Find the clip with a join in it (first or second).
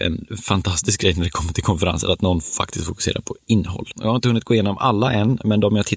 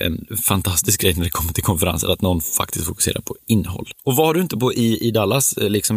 first